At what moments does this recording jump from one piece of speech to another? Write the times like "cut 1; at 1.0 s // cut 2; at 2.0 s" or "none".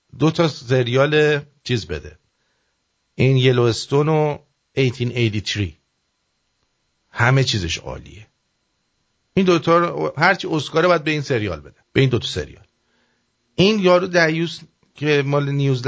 cut 1; at 11.8 s